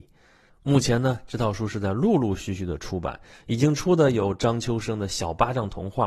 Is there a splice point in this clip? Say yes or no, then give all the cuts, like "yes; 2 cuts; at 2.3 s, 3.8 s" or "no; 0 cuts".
no; 0 cuts